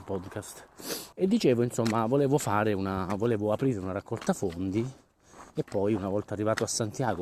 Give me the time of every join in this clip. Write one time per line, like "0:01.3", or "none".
0:01.1